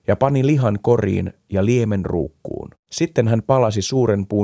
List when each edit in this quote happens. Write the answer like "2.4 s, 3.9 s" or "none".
2.8 s